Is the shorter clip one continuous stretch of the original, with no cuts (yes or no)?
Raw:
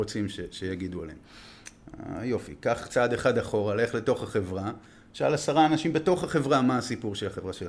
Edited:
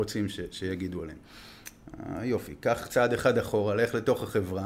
yes